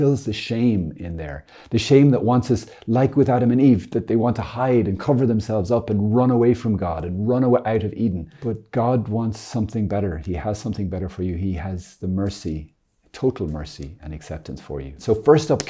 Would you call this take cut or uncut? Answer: uncut